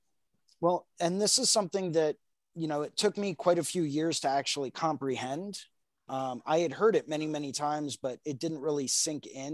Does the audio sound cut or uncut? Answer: uncut